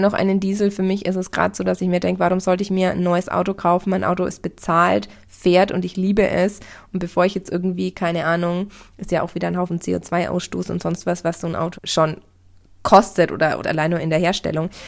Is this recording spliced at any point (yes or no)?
yes